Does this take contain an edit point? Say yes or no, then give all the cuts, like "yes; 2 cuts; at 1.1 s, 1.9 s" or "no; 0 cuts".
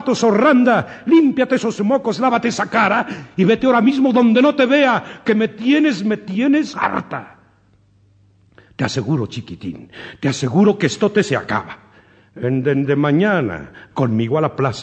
yes; 2 cuts; at 6.7 s, 13.9 s